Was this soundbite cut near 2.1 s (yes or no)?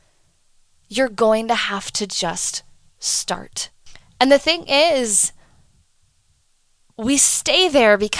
no